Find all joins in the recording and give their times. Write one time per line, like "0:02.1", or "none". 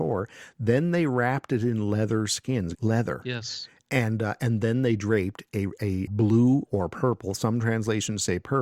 0:02.7
0:06.1